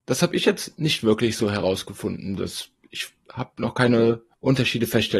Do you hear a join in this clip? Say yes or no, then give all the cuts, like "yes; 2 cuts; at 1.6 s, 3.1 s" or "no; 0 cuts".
no; 0 cuts